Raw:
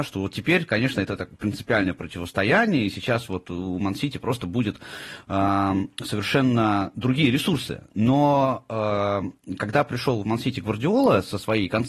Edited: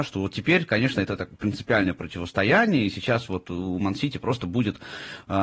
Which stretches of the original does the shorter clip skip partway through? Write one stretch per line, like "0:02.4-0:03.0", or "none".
none